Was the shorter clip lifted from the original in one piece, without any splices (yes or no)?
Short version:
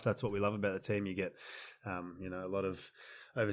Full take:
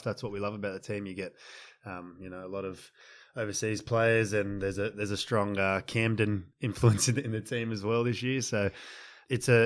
yes